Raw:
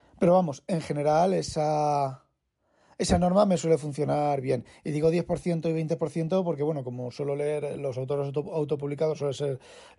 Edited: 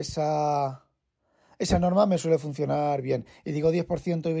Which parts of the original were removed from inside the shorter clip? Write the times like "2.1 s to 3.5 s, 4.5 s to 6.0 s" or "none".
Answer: none